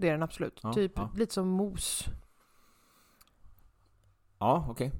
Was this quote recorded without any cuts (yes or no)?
yes